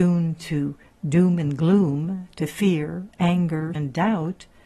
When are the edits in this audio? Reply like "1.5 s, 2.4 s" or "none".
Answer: 3.8 s